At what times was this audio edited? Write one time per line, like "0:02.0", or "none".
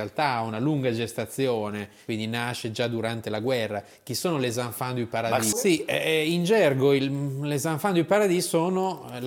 0:05.5